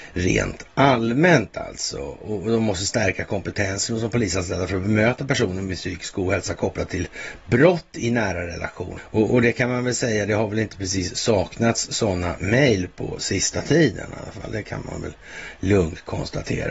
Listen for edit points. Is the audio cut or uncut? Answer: cut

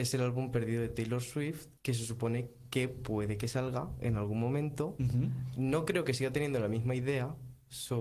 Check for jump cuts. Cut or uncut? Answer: cut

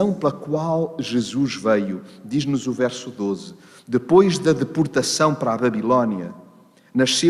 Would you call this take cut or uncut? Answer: uncut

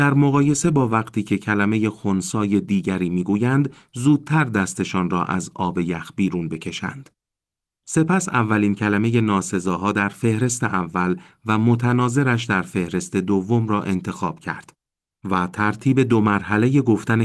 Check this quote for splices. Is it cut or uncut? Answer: cut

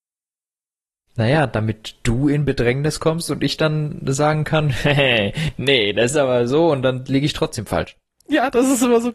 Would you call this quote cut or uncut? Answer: cut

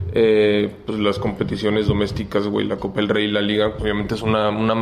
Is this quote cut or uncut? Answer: cut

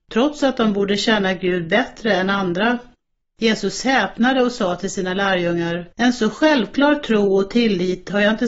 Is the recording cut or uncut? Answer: cut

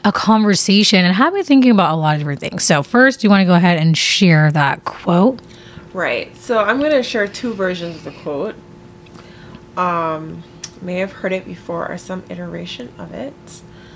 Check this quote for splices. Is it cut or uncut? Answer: uncut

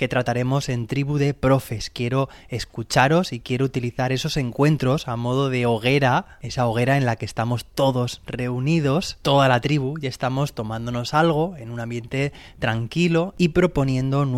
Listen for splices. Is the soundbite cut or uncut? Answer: uncut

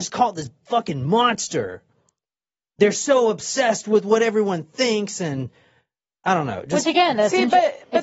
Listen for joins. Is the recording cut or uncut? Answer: uncut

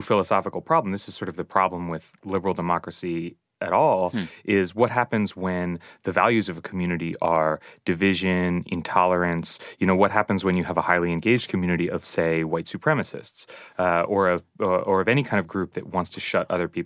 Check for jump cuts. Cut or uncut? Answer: uncut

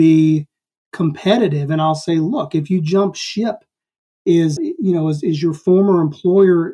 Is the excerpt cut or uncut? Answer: cut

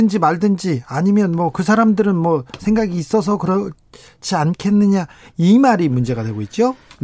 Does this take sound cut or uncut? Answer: uncut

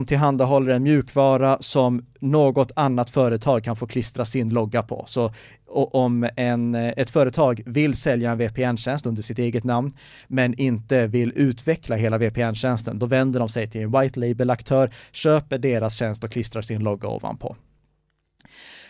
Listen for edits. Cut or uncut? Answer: uncut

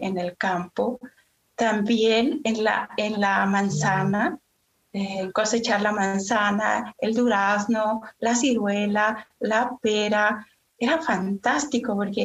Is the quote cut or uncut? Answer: uncut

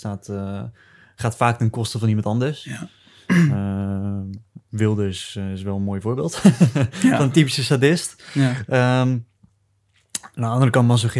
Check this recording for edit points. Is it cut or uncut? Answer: uncut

